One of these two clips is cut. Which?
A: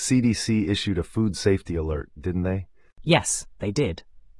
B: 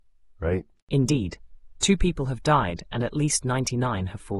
B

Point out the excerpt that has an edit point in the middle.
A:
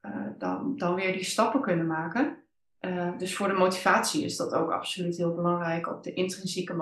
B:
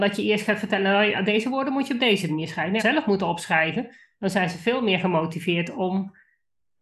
B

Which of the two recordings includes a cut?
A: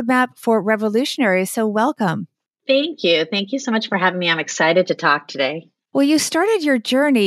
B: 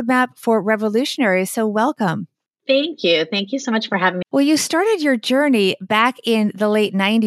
B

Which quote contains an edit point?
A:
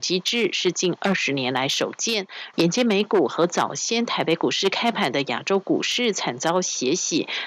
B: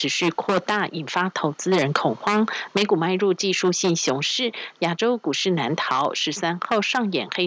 A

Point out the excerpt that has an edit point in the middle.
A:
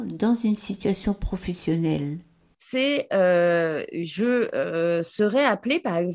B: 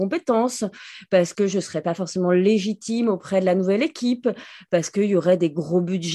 A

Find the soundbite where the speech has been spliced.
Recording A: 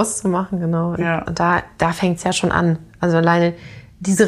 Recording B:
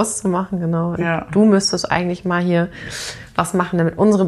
A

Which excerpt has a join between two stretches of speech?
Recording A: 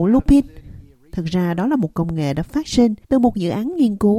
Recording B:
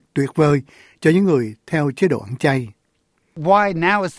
A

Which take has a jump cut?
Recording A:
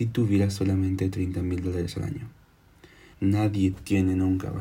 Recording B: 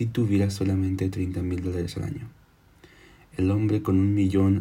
A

